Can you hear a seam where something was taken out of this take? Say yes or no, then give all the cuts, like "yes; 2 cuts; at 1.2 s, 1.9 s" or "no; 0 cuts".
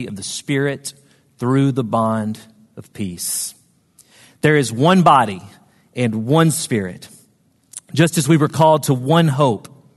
no; 0 cuts